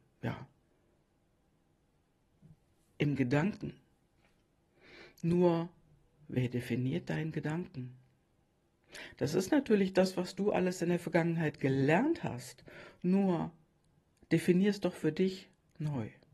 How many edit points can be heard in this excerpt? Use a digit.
0